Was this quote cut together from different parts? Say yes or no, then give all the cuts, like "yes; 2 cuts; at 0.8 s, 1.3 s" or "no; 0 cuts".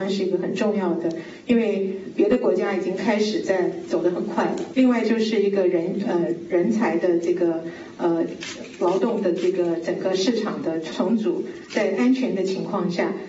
yes; 2 cuts; at 4.7 s, 11.7 s